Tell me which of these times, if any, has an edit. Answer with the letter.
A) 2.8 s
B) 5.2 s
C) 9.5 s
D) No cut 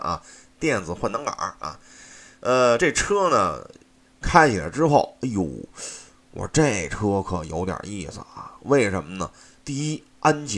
D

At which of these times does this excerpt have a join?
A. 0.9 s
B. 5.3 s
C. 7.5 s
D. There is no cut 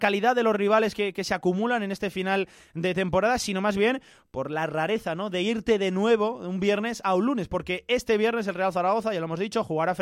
D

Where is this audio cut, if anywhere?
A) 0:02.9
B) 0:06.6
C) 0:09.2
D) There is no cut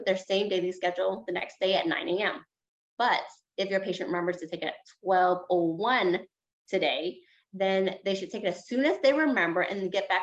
A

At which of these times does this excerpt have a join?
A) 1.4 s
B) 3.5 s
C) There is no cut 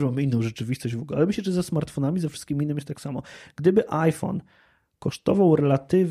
C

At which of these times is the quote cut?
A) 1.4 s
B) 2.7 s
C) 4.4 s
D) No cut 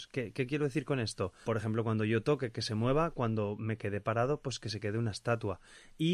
A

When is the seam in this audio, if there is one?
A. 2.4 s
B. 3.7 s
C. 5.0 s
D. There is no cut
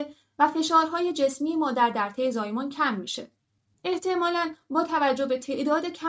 B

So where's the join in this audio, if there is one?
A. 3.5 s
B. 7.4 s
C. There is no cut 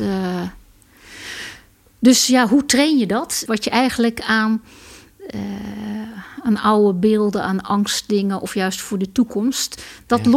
A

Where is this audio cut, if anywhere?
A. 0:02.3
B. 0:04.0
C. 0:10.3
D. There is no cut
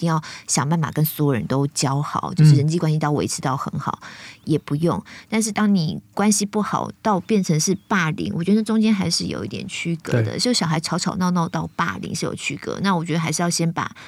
D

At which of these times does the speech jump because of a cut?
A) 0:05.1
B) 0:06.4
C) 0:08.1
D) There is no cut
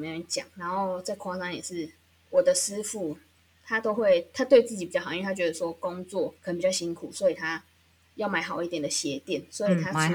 B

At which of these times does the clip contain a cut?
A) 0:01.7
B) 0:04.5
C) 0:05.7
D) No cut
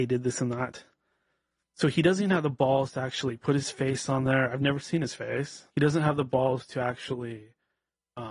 C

